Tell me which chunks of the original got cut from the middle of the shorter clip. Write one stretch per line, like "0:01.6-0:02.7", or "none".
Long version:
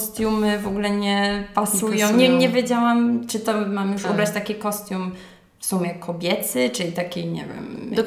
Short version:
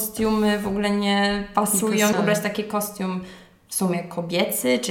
0:02.1-0:04.0